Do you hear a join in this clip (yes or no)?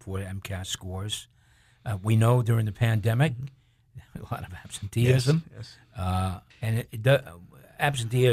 yes